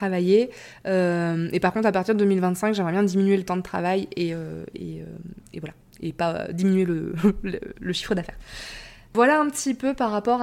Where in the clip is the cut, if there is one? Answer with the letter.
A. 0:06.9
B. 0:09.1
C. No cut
C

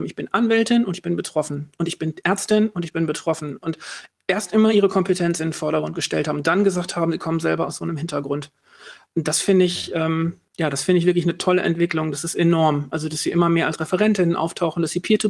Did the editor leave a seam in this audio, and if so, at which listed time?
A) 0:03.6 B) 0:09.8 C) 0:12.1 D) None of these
D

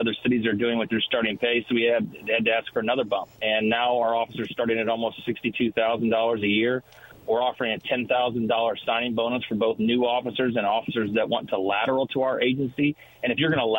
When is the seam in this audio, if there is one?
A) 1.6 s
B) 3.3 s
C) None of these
B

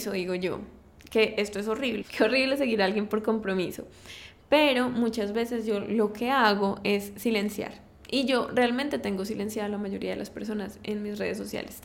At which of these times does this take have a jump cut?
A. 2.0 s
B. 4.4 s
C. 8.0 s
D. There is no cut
A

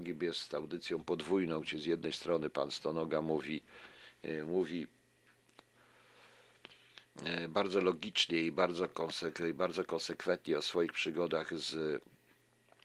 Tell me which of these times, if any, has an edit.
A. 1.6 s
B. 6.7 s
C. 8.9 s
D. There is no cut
D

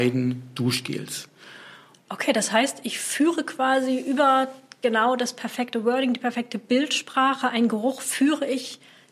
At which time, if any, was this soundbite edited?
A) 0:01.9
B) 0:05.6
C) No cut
A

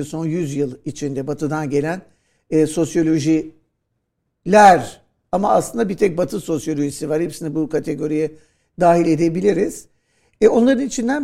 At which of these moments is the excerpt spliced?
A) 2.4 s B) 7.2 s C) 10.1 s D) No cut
D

